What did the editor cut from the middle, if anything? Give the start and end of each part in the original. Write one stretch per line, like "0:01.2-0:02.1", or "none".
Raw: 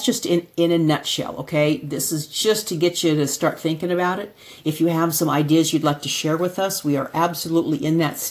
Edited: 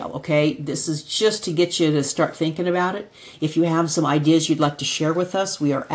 none